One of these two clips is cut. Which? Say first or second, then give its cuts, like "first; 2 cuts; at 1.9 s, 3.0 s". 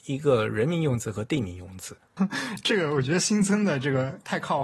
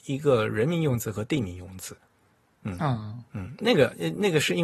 first; 1 cut; at 2.2 s